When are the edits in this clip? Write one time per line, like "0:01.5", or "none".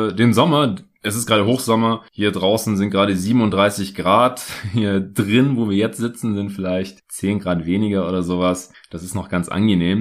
none